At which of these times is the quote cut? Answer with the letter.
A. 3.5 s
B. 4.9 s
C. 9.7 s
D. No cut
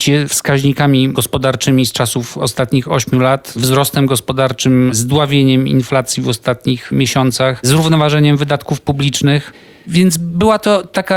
D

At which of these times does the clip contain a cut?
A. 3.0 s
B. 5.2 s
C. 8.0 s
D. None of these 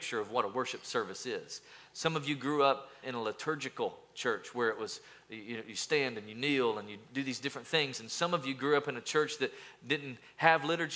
A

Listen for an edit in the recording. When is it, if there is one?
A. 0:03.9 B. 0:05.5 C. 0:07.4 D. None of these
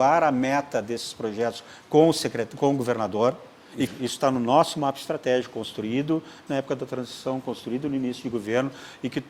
A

